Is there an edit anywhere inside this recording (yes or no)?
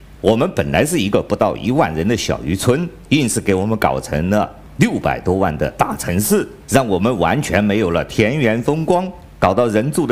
yes